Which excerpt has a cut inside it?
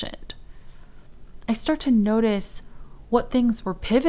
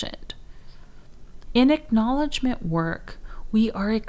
second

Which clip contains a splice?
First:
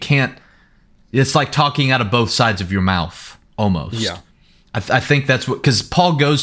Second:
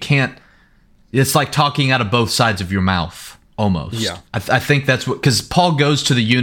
second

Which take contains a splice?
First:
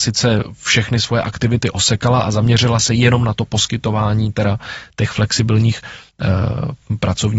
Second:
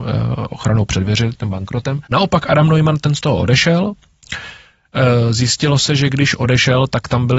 second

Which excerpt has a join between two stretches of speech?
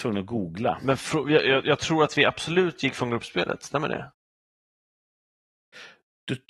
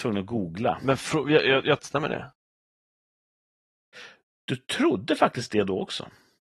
second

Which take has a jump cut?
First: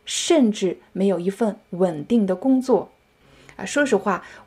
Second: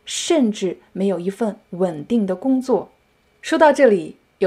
first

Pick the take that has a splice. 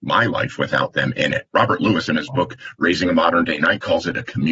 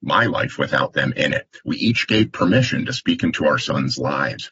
first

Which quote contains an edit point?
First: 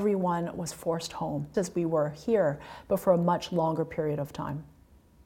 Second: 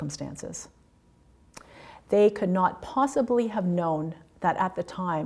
first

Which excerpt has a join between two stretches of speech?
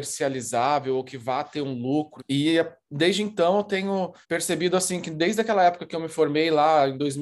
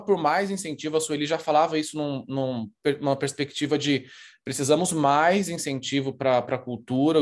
first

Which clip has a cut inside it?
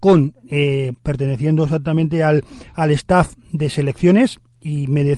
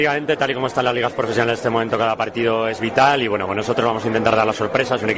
first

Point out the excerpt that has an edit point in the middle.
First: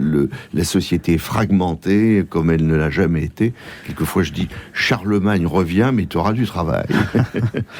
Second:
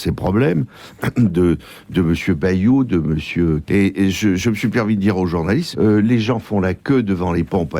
second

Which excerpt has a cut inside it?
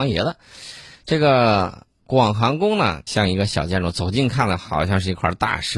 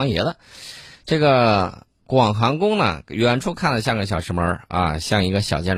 first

